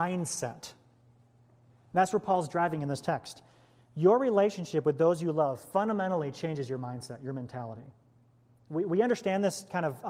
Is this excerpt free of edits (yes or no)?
yes